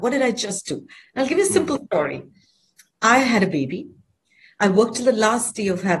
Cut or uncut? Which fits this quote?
uncut